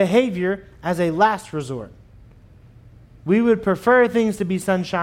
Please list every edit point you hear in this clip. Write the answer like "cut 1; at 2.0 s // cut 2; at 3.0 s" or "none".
none